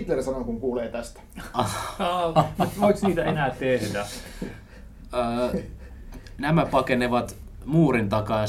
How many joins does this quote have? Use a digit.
0